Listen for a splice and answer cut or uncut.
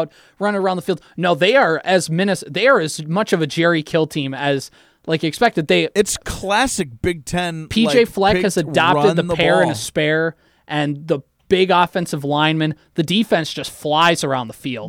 uncut